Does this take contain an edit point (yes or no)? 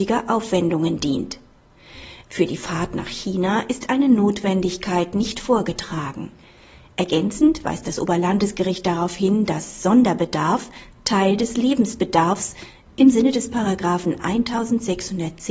yes